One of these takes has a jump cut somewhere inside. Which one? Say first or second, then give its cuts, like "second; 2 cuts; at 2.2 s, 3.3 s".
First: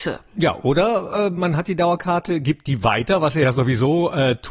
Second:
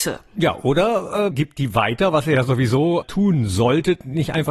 second; 2 cuts; at 1.3 s, 3.0 s